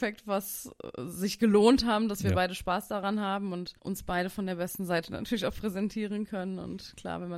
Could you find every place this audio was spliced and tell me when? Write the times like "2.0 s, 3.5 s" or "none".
3.8 s